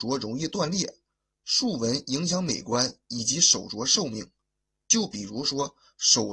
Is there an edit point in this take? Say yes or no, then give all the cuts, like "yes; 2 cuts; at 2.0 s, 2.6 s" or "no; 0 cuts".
yes; 1 cut; at 4.8 s